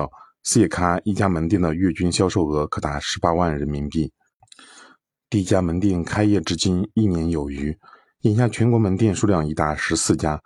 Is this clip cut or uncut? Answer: uncut